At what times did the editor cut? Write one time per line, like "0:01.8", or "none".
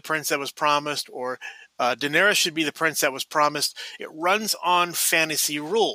0:04.0